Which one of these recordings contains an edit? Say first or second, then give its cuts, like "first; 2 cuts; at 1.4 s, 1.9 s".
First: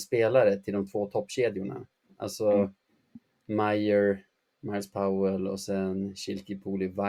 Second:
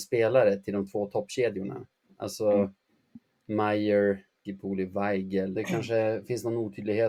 second; 2 cuts; at 4.5 s, 5.6 s